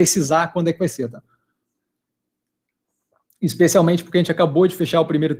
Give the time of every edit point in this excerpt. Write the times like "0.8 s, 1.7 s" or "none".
none